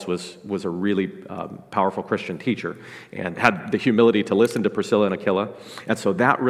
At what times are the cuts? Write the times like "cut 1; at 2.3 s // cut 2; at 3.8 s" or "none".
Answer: cut 1; at 3.3 s